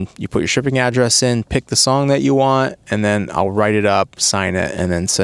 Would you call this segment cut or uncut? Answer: uncut